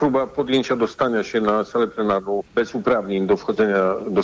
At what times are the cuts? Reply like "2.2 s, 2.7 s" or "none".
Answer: 2.5 s